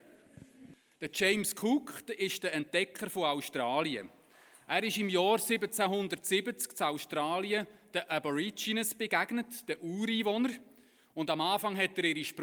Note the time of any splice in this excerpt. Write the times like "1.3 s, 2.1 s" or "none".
1.0 s

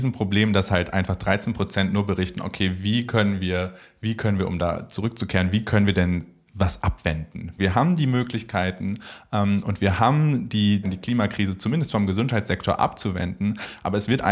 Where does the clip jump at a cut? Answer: 7.6 s, 10.8 s

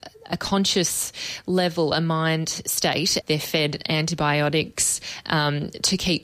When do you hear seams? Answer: 3.2 s

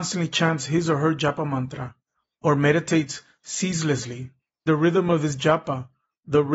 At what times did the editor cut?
4.7 s

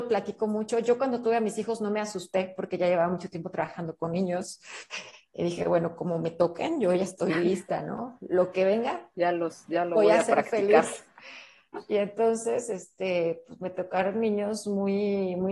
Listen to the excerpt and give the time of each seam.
none

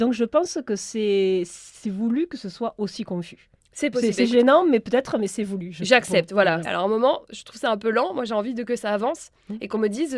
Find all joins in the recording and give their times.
6.7 s

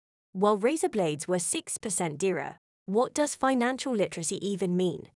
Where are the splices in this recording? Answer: 2.7 s

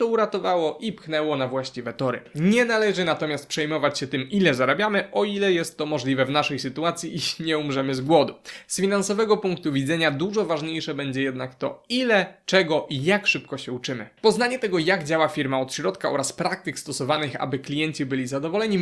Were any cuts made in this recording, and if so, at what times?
none

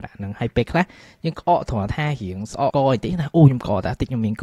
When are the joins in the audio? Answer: 2.7 s

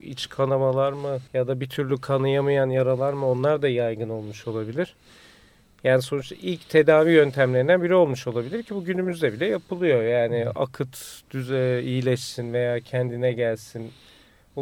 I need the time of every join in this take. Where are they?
1.3 s

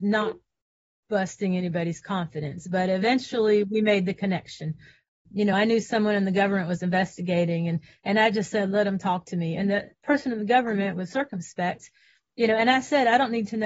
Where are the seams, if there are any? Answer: none

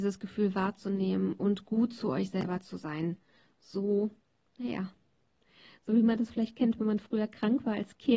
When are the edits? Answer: none

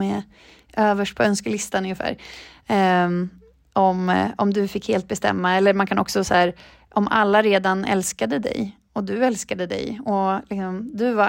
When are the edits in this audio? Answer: none

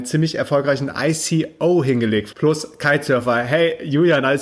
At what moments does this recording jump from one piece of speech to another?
2.3 s

